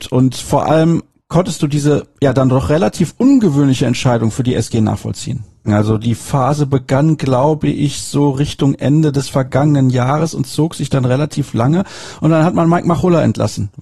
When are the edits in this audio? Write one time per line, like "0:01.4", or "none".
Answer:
0:05.7
0:12.2

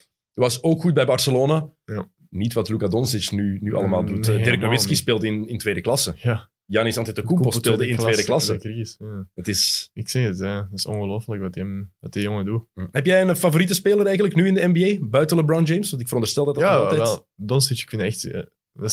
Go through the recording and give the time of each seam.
none

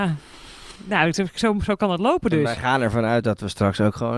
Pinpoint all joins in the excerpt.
none

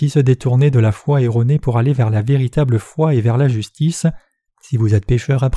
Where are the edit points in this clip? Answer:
0:04.5

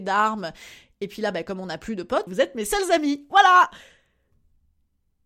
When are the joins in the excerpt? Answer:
0:02.3

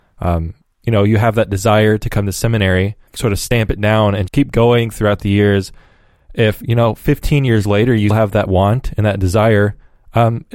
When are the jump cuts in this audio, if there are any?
0:03.1
0:04.3
0:08.1

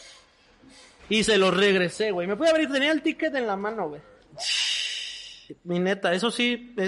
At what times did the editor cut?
0:01.0

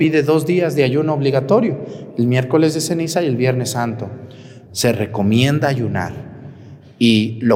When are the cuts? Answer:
0:04.7

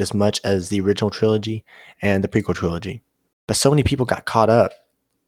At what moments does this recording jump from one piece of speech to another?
0:03.3

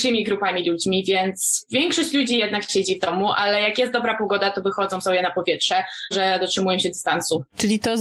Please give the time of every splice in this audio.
0:06.1

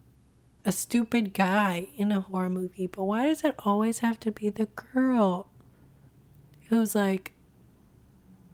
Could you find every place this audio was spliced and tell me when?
none

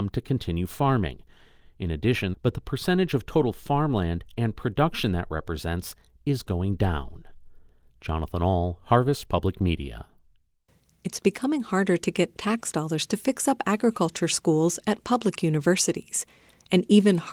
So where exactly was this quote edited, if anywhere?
0:02.3

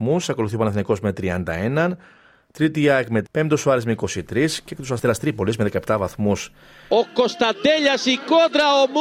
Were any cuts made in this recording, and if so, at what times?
0:03.3
0:06.9

